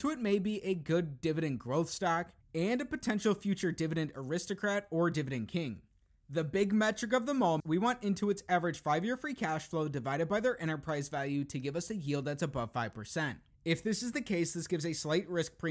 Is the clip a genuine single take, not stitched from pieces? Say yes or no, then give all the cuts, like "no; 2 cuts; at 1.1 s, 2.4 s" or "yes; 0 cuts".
no; 1 cut; at 7.6 s